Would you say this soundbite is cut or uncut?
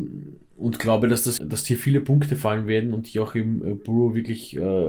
cut